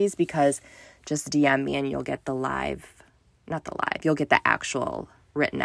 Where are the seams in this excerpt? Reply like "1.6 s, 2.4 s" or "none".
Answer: none